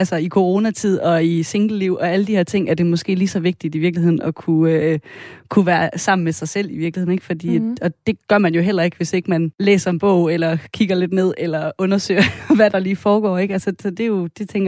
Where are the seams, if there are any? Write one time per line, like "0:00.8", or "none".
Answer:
none